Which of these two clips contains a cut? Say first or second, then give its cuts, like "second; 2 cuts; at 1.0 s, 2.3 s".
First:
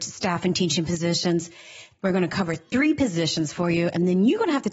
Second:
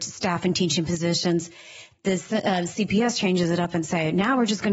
first; 1 cut; at 2.0 s